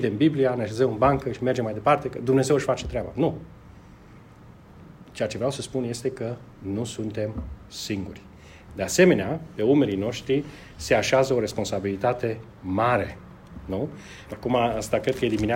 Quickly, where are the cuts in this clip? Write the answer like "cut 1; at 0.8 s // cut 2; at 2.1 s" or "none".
cut 1; at 14.3 s

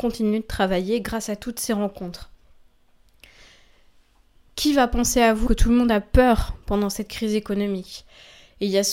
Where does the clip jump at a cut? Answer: cut 1; at 5.5 s

